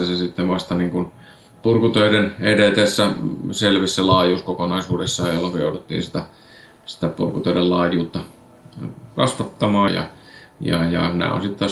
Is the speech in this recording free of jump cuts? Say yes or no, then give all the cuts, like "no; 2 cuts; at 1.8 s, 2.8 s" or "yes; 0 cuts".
no; 1 cut; at 9.9 s